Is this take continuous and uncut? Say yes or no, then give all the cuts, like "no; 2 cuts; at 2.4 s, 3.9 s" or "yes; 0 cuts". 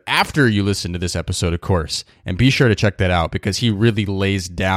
yes; 0 cuts